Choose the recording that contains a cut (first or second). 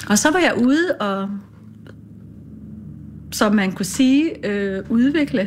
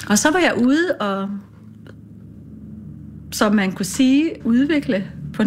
second